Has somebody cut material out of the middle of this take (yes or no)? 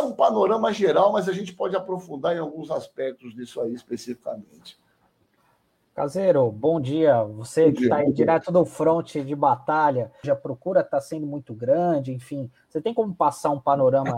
yes